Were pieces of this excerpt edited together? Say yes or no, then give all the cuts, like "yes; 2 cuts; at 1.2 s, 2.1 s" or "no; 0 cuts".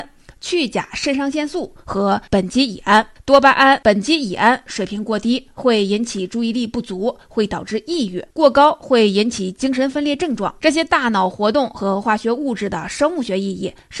yes; 2 cuts; at 8.3 s, 10.6 s